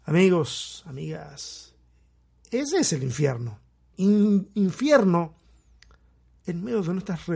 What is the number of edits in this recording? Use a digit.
1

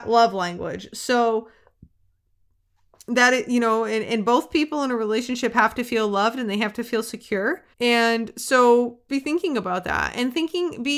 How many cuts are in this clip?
2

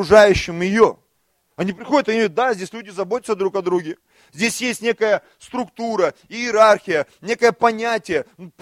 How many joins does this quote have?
0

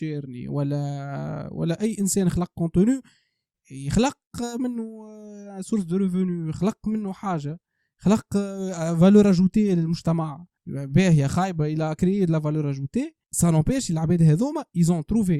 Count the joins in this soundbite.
2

